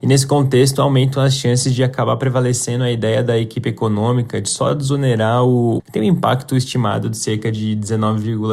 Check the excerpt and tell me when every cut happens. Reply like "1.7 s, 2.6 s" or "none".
5.8 s